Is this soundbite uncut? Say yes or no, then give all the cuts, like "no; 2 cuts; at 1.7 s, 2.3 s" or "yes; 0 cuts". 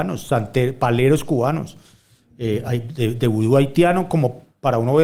yes; 0 cuts